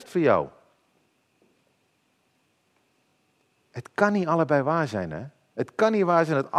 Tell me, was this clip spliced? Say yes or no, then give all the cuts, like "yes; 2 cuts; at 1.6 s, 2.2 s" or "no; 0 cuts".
no; 0 cuts